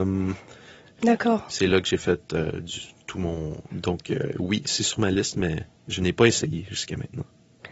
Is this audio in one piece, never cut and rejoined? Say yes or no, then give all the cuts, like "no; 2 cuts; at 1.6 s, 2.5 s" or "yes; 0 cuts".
no; 2 cuts; at 0.9 s, 3.7 s